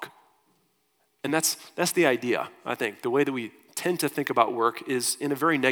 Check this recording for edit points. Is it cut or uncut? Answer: uncut